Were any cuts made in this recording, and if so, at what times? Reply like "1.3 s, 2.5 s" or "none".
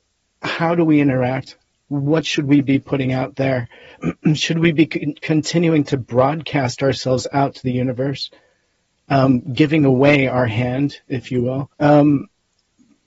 11.7 s